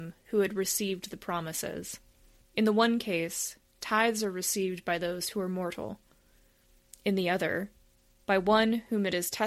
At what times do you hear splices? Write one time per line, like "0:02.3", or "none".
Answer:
0:02.4